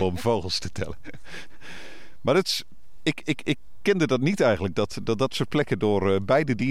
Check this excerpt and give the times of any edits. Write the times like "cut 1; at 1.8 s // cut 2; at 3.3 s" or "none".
none